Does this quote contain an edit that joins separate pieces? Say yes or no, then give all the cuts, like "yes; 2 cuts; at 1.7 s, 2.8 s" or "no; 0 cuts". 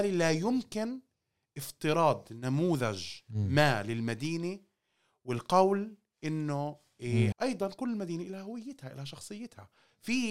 yes; 1 cut; at 7.3 s